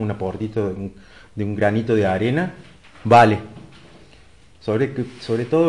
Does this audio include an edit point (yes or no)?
no